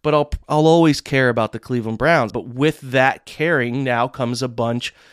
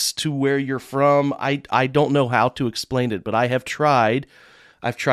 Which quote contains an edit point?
first; 1 cut; at 2.3 s

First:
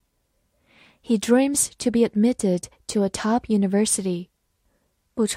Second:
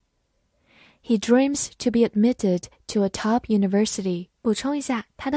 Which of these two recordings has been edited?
second; 1 cut; at 4.4 s

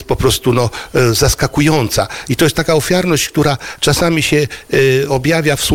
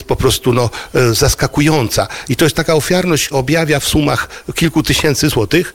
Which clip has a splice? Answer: second; 1 cut; at 3.3 s

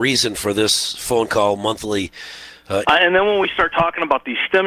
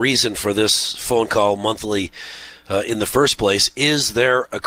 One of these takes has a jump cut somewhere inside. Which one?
first; 1 cut; at 2.8 s

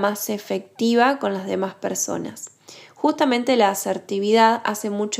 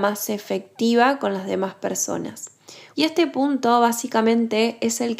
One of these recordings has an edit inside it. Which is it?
second; 1 cut; at 2.9 s

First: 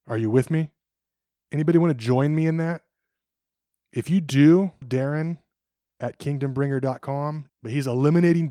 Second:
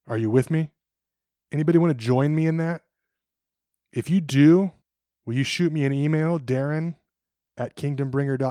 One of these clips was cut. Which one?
first; 2 cuts; at 4.8 s, 7.5 s

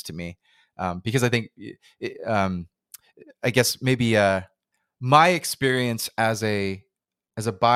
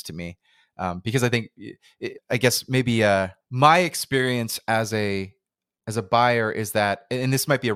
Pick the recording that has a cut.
second; 2 cuts; at 2.2 s, 3.4 s

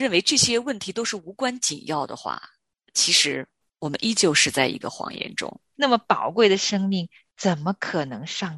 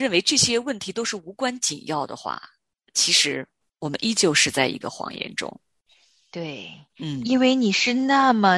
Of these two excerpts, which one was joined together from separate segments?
first; 1 cut; at 5.7 s

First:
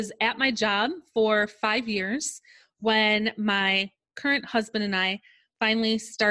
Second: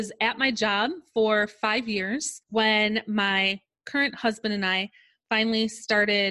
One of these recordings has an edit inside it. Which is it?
second; 1 cut; at 2.4 s

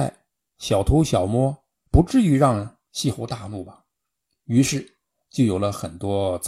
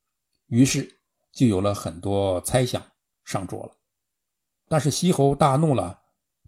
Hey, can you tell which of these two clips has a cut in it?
first; 1 cut; at 1.9 s

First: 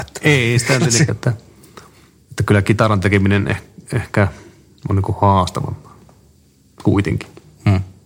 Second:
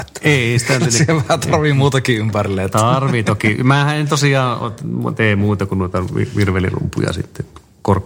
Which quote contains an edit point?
first; 1 cut; at 1.1 s

